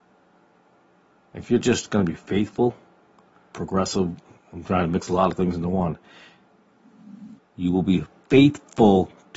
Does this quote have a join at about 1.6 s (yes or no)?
no